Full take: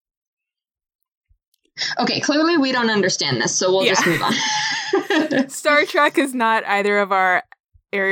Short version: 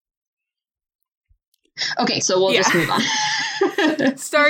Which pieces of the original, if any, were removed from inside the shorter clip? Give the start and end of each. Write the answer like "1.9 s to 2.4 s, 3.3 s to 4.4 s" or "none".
2.2 s to 3.5 s